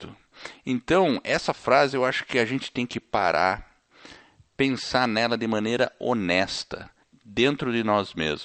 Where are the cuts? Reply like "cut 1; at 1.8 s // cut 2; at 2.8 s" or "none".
none